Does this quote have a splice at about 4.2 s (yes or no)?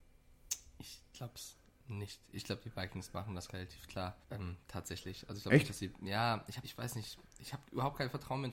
yes